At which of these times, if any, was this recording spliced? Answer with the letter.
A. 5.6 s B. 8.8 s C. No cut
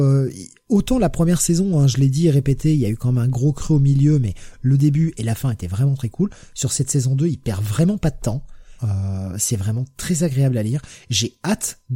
B